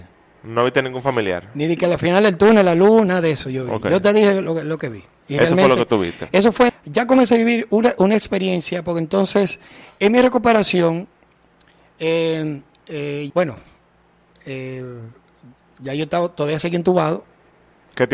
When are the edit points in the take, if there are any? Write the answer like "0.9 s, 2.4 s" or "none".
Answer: 6.7 s, 13.3 s